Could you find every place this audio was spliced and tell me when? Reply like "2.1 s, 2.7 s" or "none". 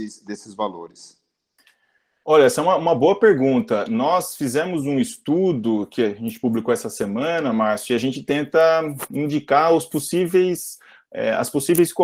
none

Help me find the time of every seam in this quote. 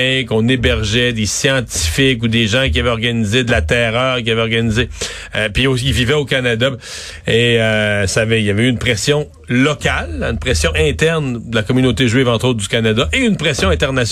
7.2 s

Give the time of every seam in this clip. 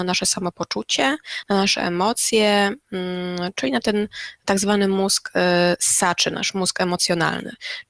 none

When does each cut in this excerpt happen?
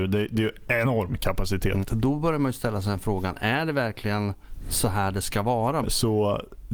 1.8 s, 5.8 s

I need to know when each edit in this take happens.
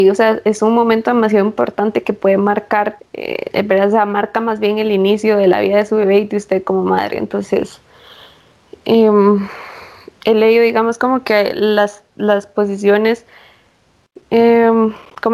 3.0 s

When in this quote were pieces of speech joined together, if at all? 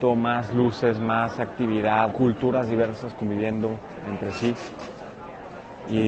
2.1 s

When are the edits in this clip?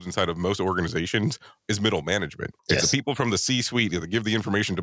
2.6 s

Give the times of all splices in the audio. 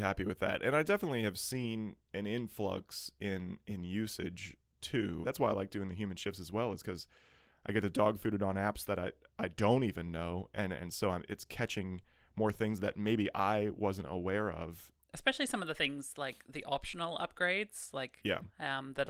5.2 s

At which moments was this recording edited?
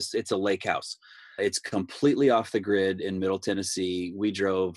1.4 s

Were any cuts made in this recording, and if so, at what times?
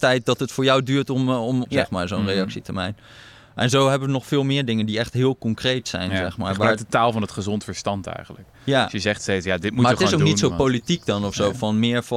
1.6 s

